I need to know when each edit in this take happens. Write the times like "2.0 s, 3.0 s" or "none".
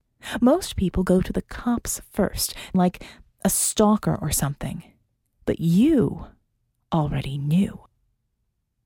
2.7 s